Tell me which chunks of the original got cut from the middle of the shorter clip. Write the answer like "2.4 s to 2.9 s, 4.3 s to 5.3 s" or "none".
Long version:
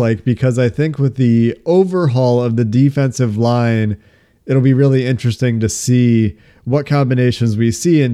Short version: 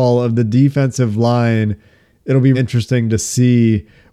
4.7 s to 5.0 s